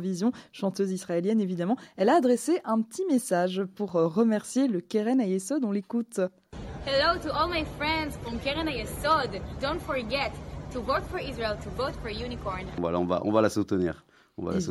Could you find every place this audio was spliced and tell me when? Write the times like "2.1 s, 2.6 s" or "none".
9.6 s, 12.8 s